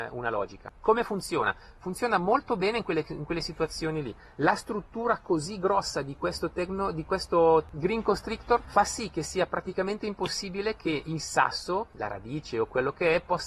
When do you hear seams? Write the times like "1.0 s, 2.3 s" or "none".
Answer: none

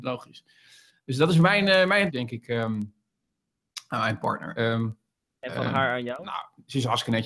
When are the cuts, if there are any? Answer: 2.1 s, 4.6 s

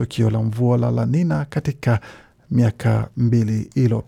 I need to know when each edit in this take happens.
none

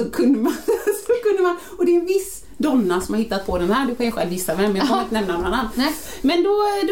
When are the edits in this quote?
none

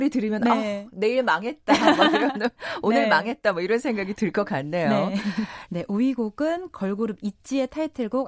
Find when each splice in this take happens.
5.7 s

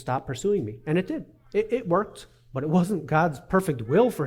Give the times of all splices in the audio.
none

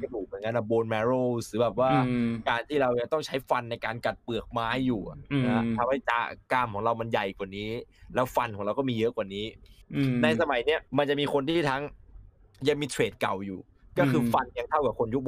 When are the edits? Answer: 10.9 s

